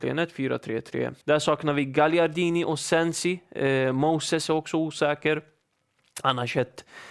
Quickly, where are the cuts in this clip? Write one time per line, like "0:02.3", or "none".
0:01.2